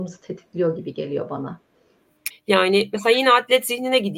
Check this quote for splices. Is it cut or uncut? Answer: cut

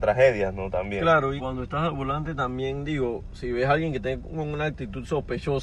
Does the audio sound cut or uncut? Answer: cut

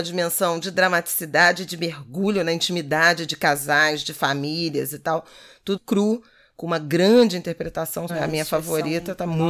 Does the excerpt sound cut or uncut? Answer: cut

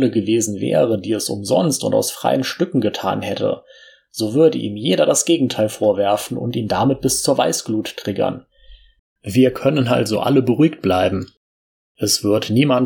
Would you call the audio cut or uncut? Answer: cut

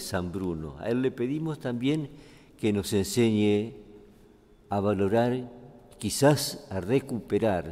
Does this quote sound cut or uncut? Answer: uncut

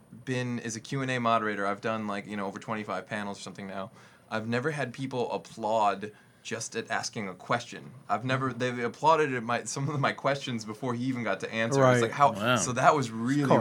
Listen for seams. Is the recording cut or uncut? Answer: cut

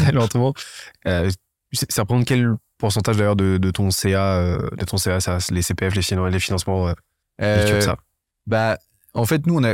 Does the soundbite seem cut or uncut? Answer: uncut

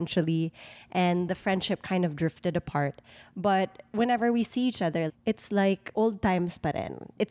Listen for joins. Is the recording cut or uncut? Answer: cut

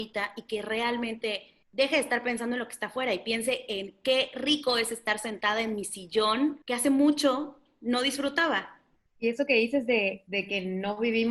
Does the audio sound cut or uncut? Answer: uncut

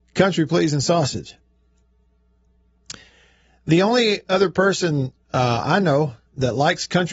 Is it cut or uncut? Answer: uncut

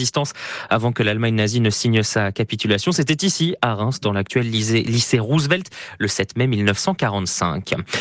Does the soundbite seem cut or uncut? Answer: uncut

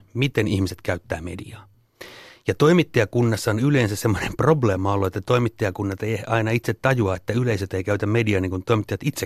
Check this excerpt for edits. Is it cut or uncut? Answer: uncut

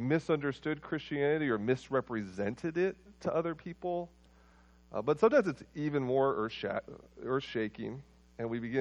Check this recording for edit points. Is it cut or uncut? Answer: uncut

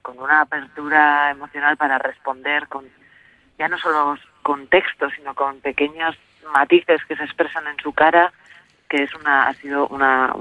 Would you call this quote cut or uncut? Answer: uncut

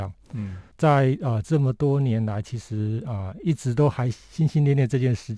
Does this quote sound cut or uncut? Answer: uncut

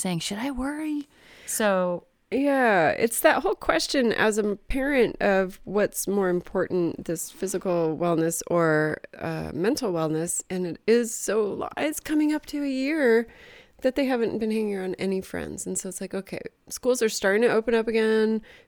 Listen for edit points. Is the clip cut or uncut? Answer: uncut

